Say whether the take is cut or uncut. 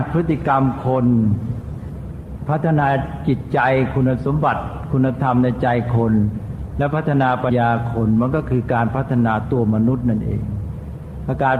cut